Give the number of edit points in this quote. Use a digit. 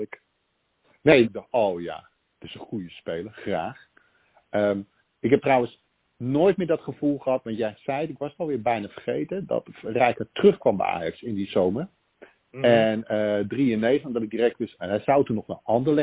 2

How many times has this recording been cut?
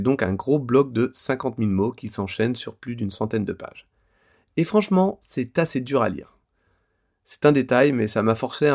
0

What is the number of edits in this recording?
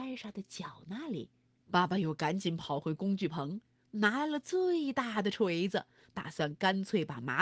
1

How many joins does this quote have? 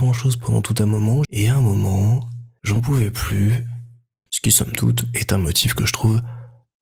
2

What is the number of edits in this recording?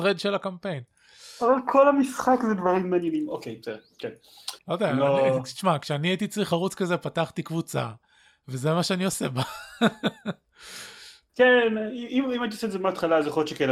1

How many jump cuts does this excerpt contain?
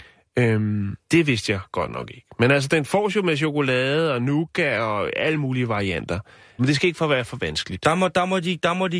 2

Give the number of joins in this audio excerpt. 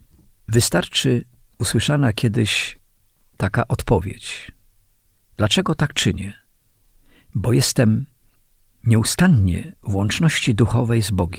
0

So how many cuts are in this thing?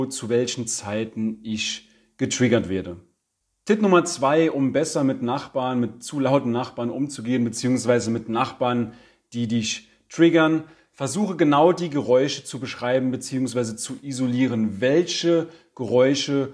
0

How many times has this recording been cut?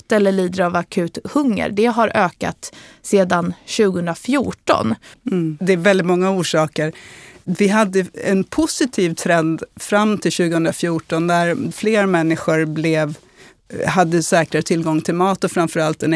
1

